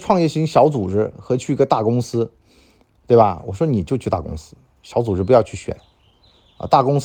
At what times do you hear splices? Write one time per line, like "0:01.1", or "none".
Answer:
none